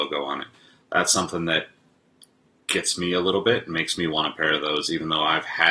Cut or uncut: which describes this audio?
uncut